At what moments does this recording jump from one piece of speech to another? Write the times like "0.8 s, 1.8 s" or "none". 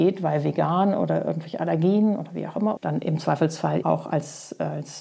2.8 s, 3.8 s

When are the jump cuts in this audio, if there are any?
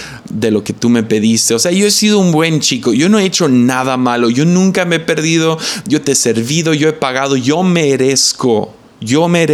none

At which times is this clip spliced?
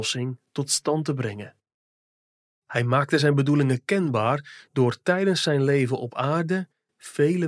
none

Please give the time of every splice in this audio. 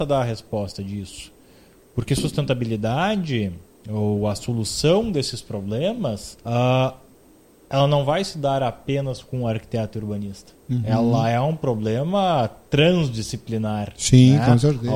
6.4 s, 10.6 s

